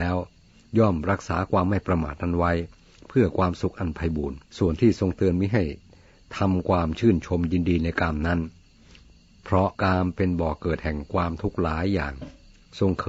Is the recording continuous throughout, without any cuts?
no; 2 cuts; at 4.5 s, 9.7 s

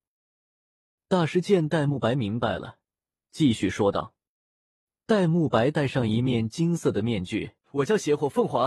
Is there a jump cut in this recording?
yes; 2 cuts; at 3.2 s, 7.6 s

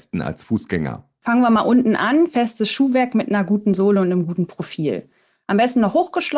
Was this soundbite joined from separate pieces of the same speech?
no; 0 cuts

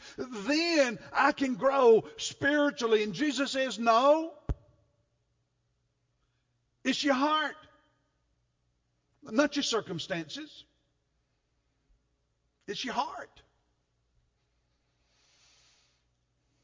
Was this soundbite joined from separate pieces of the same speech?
no; 0 cuts

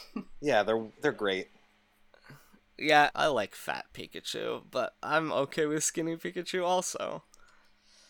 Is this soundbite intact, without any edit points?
no; 1 cut; at 3.1 s

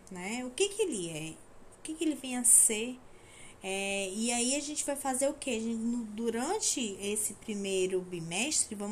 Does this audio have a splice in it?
no; 0 cuts

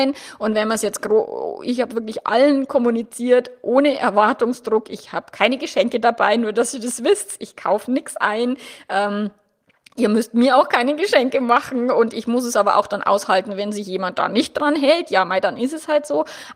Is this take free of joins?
yes; 0 cuts

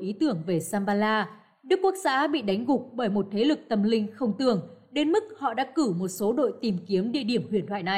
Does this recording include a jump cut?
no; 0 cuts

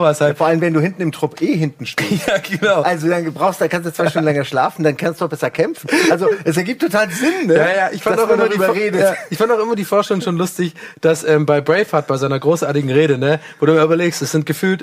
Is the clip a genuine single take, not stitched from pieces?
yes; 0 cuts

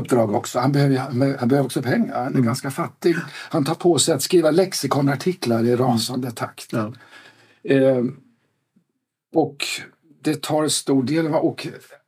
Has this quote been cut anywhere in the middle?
no; 0 cuts

